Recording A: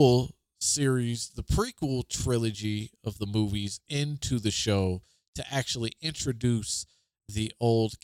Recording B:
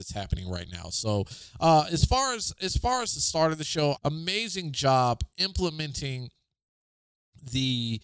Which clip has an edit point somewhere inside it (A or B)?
B